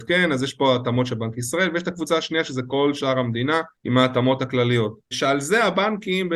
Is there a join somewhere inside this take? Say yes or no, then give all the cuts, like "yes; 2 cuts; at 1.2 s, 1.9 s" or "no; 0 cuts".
yes; 2 cuts; at 3.7 s, 5.1 s